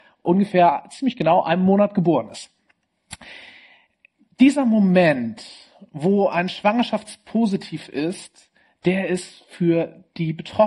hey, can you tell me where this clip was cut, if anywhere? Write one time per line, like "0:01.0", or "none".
none